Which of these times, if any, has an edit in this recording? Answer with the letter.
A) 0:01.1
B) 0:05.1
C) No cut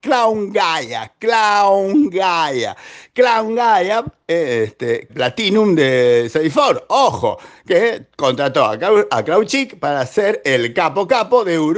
B